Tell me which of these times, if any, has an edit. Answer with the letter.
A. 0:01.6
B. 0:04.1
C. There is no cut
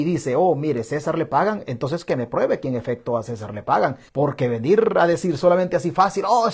B